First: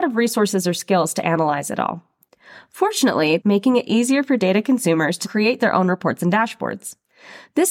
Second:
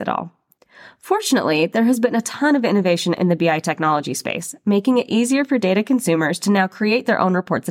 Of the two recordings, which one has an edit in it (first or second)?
first